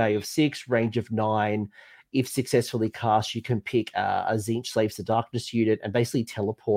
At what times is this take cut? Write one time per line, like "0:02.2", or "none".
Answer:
none